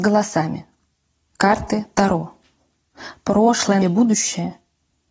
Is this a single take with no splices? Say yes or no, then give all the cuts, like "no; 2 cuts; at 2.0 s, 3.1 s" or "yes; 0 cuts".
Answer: no; 1 cut; at 3.8 s